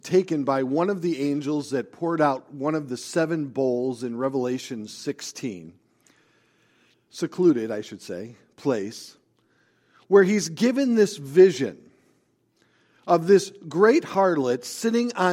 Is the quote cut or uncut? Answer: cut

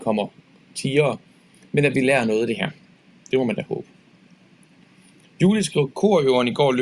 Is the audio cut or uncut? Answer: uncut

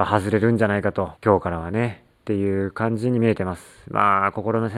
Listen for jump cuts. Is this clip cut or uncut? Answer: cut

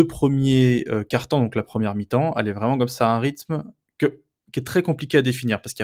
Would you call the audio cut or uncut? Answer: uncut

